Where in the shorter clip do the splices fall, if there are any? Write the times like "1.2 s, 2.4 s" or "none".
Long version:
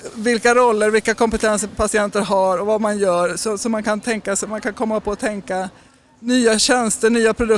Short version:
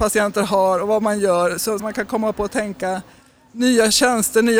1.8 s